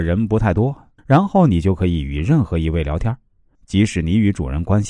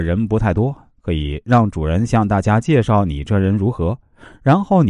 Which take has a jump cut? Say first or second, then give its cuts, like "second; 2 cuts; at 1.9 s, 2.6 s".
first; 2 cuts; at 1.0 s, 3.5 s